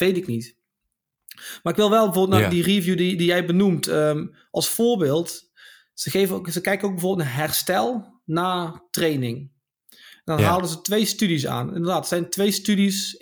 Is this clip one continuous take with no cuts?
yes; 0 cuts

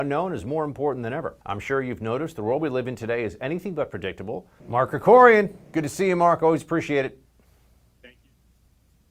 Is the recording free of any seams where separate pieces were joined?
no; 2 cuts; at 1.4 s, 4.6 s

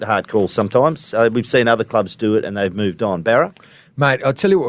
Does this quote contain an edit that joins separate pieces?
no; 0 cuts

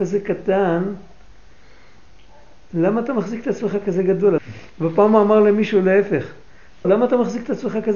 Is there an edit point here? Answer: yes; 2 cuts; at 4.4 s, 6.8 s

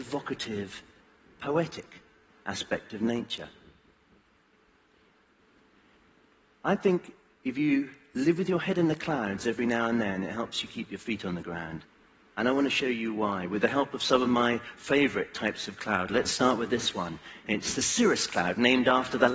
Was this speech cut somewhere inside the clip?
no; 0 cuts

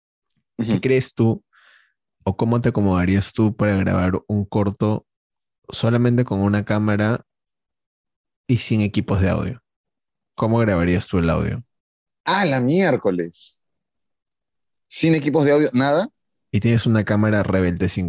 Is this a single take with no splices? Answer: yes; 0 cuts

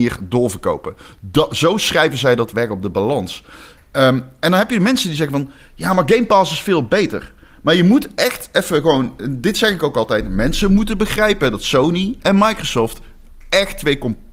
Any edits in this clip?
no; 0 cuts

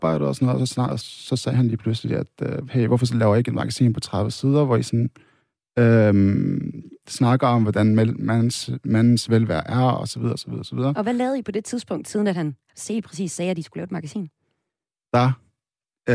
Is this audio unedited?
no; 1 cut; at 1.0 s

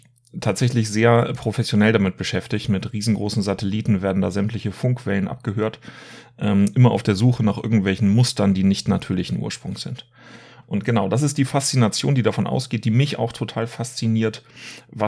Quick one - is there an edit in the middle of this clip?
yes; 1 cut; at 10.6 s

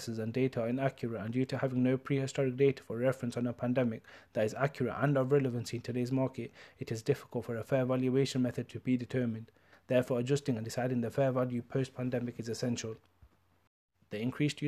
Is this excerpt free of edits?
no; 1 cut; at 9.7 s

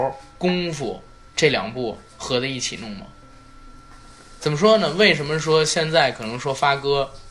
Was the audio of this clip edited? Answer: yes; 1 cut; at 4.4 s

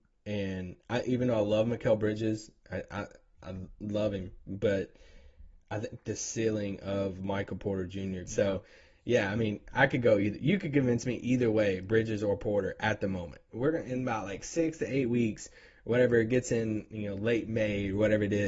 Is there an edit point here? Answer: yes; 2 cuts; at 8.2 s, 13.5 s

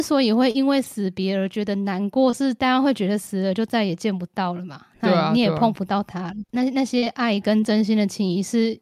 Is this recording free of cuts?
yes; 0 cuts

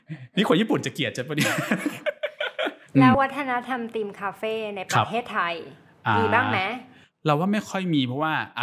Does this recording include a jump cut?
yes; 1 cut; at 3.1 s

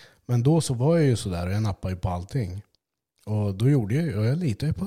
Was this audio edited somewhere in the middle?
no; 0 cuts

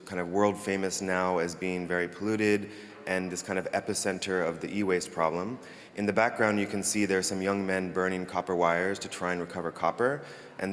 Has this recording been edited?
no; 0 cuts

